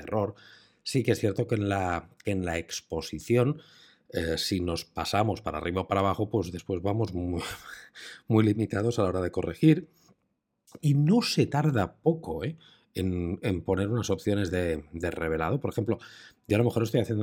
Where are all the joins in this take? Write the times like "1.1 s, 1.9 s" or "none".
10.8 s